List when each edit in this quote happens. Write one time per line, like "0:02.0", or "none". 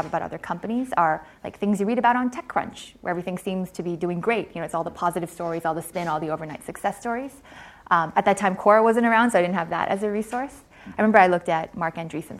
none